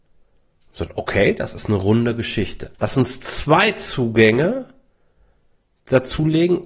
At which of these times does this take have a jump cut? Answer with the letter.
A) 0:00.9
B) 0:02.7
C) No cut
B